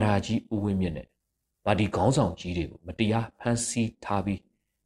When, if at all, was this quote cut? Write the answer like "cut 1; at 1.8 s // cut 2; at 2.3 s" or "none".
none